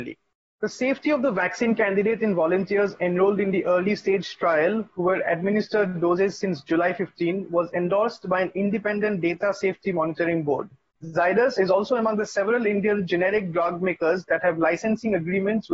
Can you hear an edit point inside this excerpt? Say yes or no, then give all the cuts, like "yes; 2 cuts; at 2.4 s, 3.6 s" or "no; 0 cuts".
no; 0 cuts